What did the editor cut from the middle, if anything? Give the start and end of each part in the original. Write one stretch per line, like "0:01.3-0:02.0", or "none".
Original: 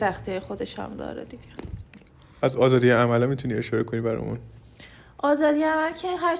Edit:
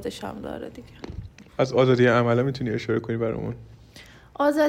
0:02.0-0:02.3

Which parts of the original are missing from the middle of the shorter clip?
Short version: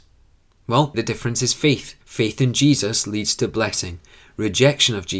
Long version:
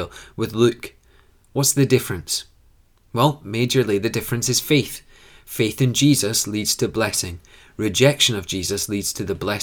0:03.4-0:04.0
0:05.1-0:05.4

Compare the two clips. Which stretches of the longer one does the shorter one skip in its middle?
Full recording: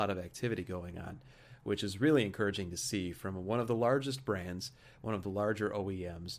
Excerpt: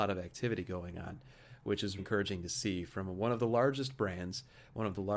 0:02.0-0:02.3

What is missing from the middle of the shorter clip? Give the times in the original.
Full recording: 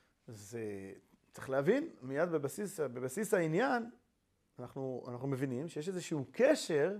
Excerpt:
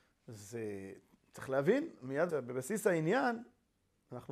0:02.3-0:02.8

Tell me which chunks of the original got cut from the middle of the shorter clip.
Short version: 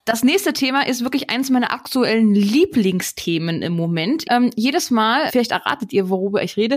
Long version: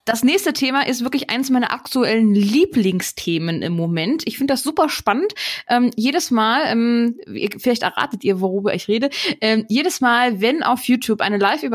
0:04.2-0:05.6
0:06.7-0:07.6

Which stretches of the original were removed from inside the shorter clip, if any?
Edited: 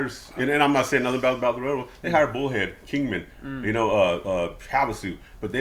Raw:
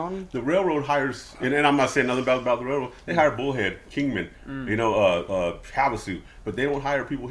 none

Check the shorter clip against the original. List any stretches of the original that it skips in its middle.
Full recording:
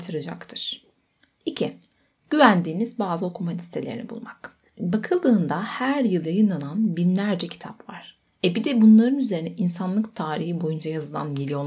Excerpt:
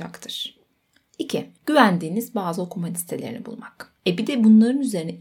0:01.8-0:02.2
0:04.6-0:08.3

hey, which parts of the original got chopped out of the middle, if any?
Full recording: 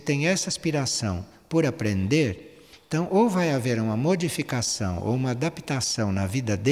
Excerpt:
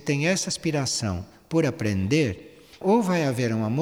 0:02.8-0:03.1

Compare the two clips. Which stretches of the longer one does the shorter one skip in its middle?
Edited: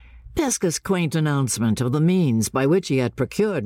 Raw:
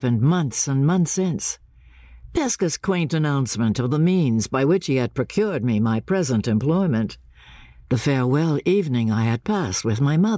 none

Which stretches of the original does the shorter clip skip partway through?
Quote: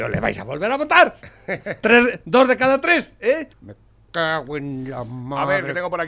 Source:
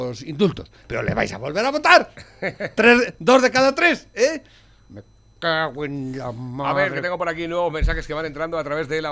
0:04.5-0:04.8

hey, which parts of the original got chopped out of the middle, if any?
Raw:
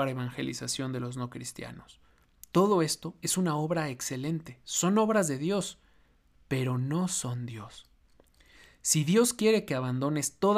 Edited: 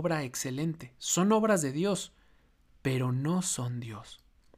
none

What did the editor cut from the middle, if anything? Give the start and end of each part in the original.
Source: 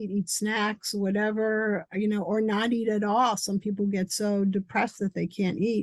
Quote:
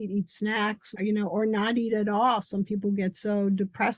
0:00.9-0:01.9

